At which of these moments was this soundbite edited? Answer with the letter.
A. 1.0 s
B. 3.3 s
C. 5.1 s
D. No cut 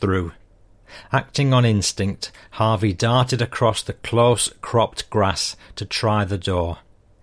A